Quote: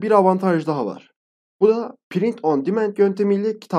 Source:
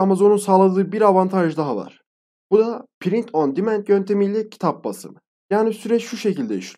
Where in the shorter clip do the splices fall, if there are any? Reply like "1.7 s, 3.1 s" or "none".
none